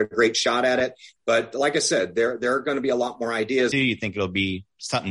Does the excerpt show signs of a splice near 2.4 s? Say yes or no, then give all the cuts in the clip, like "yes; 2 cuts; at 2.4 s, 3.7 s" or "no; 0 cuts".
no; 2 cuts; at 1.2 s, 3.7 s